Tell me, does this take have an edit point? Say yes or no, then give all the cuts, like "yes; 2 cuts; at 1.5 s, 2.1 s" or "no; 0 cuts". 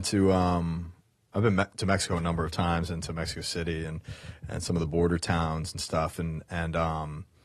no; 0 cuts